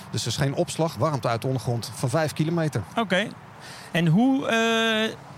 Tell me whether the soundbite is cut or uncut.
cut